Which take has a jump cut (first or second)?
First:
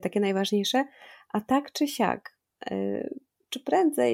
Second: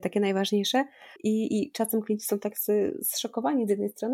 second